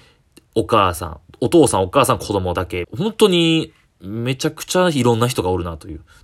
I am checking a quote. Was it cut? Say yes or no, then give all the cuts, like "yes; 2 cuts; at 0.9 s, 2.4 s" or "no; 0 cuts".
yes; 1 cut; at 2.8 s